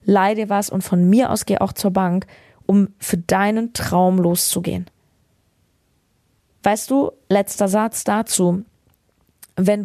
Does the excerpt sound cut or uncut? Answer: uncut